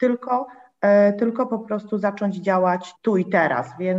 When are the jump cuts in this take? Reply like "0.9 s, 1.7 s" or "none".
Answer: 3.0 s

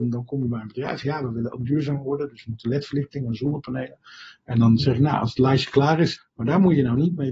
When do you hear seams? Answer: 6.2 s

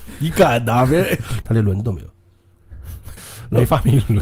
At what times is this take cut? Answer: 1.4 s, 3.2 s

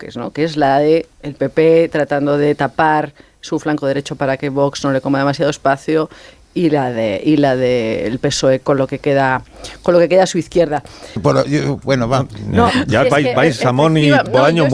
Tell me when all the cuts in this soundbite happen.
1.1 s, 11.2 s

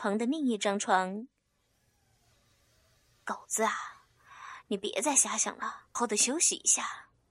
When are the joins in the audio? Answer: 6.0 s

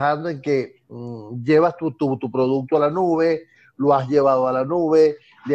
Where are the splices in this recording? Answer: none

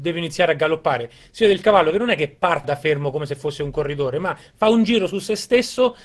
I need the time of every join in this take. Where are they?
2.6 s

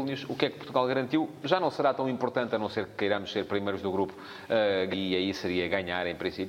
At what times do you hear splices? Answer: 1.4 s, 4.9 s

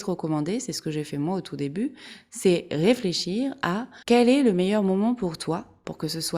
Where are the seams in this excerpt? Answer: 4.0 s

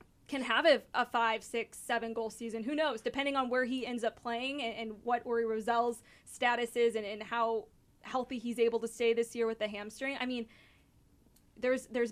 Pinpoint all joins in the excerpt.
none

